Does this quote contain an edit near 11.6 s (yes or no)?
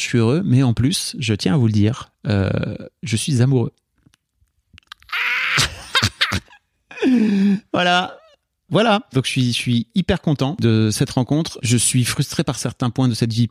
yes